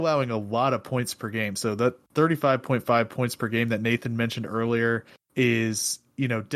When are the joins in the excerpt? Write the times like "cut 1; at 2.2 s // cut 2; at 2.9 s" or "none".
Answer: none